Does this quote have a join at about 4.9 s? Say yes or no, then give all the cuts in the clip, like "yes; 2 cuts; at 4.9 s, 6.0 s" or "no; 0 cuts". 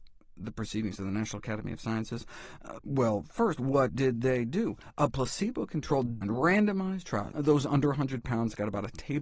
no; 3 cuts; at 2.8 s, 6.2 s, 7.3 s